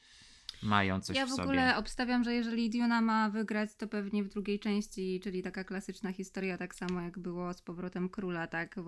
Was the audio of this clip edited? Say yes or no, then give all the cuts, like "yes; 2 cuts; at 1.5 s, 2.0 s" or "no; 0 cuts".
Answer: no; 0 cuts